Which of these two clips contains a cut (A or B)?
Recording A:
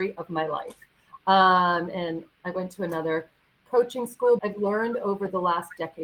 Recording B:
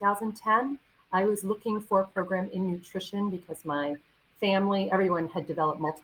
A